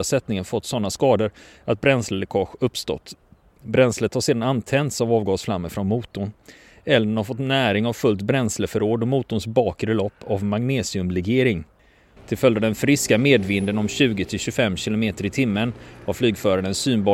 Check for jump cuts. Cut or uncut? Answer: cut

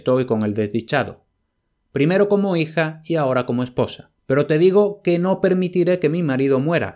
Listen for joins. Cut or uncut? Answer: cut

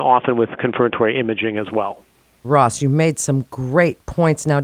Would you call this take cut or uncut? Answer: cut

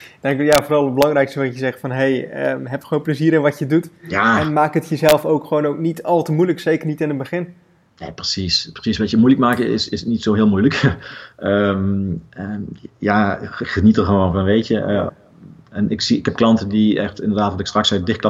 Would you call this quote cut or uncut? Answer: uncut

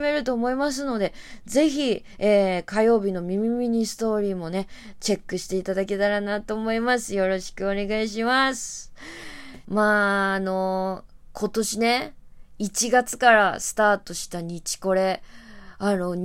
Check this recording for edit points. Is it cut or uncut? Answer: cut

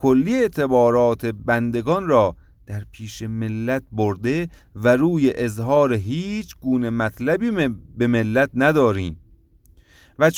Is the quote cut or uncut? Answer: uncut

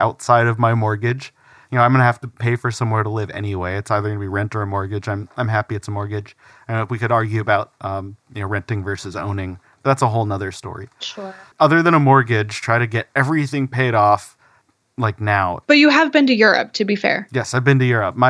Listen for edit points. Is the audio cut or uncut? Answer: cut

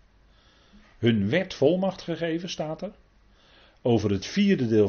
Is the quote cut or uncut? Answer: uncut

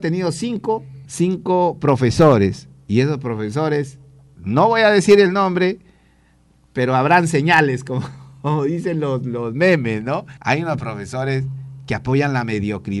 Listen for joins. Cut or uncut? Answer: cut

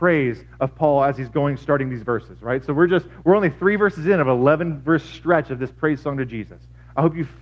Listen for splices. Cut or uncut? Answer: uncut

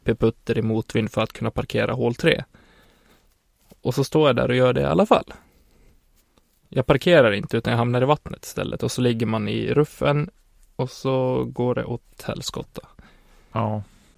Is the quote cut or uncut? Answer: uncut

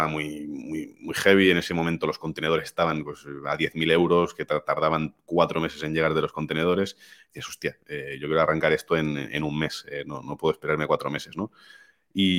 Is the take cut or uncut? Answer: uncut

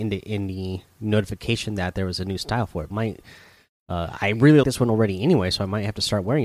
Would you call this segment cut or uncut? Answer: cut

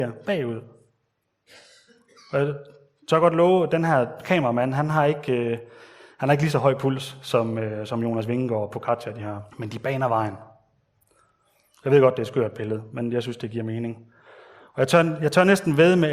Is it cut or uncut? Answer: cut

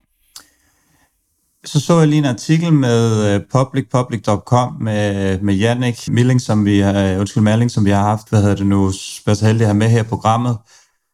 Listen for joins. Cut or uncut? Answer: cut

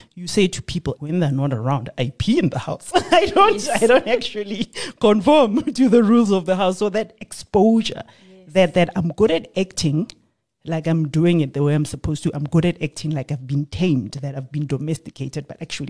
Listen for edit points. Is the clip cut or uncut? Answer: cut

